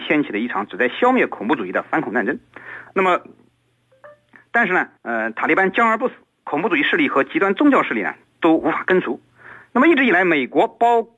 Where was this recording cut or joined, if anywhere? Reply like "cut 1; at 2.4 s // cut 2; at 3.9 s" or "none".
cut 1; at 5.0 s // cut 2; at 9.6 s